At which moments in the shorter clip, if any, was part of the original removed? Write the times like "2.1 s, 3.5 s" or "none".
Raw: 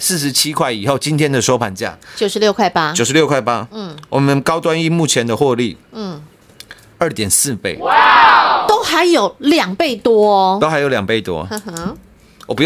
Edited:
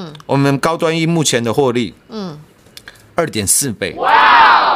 none